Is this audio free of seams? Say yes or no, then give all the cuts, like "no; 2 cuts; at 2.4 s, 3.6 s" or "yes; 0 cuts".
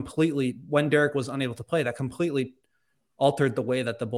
yes; 0 cuts